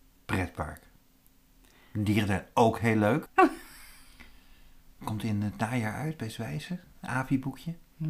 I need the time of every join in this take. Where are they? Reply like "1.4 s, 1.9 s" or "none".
3.3 s